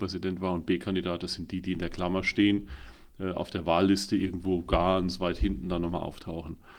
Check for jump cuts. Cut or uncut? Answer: uncut